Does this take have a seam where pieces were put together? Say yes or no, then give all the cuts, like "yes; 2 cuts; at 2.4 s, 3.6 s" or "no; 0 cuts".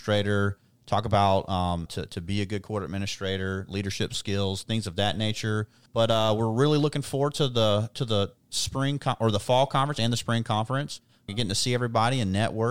yes; 3 cuts; at 1.9 s, 5.9 s, 11.3 s